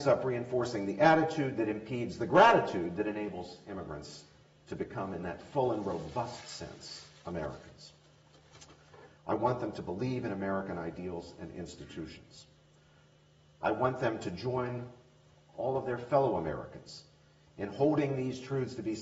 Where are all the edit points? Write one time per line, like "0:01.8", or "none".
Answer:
0:09.2